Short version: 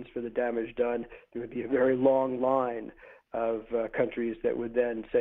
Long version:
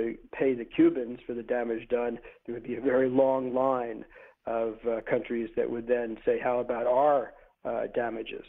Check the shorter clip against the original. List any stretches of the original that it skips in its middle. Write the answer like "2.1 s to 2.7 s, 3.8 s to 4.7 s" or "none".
none